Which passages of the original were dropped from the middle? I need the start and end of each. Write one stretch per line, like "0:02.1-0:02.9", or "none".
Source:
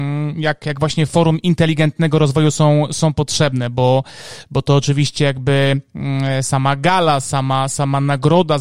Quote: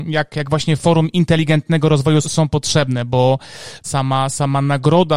0:02.5-0:02.9
0:04.5-0:07.2